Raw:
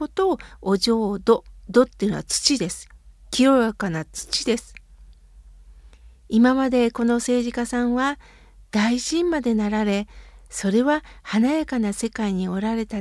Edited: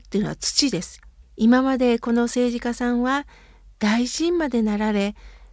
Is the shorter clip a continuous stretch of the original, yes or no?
no